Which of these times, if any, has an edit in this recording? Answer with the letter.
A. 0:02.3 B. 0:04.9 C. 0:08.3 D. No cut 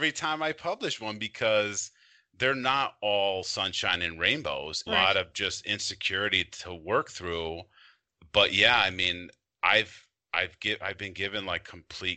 B